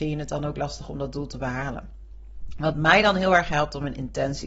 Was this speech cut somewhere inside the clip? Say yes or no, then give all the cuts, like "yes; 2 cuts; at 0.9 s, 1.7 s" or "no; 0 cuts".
no; 0 cuts